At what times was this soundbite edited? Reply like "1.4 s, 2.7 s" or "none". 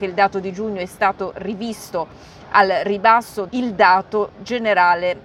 3.5 s